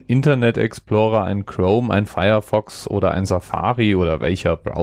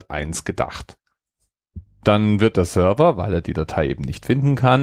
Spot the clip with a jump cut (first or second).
second